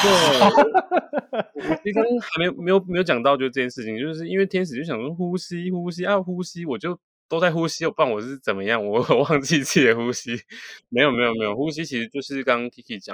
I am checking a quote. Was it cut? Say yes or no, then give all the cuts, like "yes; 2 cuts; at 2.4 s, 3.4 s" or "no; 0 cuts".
no; 0 cuts